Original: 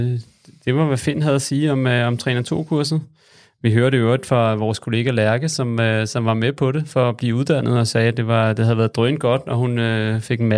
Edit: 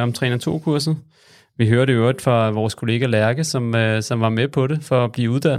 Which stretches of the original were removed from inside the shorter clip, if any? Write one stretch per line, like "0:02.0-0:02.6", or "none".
none